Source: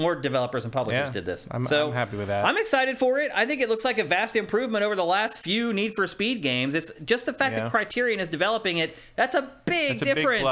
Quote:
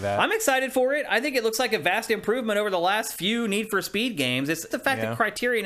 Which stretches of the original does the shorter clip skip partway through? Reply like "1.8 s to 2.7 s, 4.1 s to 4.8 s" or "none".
7.0 s to 7.2 s